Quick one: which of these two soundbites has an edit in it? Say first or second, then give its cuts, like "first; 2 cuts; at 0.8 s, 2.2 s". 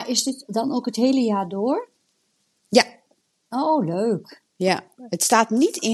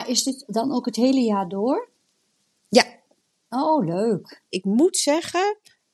second; 1 cut; at 4.5 s